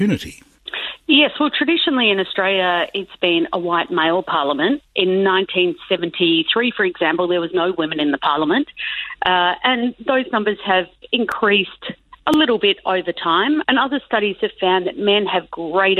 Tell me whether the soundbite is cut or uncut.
cut